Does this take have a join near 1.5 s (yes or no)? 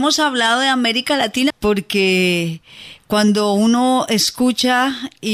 yes